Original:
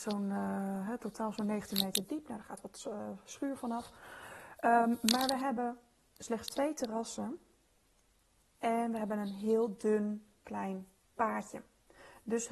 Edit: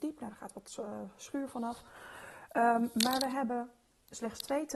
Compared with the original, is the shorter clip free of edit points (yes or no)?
yes